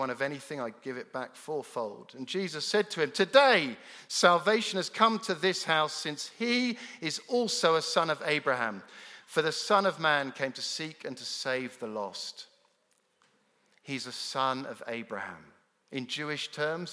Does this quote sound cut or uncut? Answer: uncut